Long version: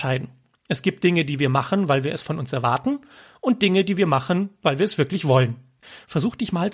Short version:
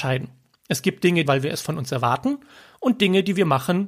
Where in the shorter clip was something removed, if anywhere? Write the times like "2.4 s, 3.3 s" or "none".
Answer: 1.3 s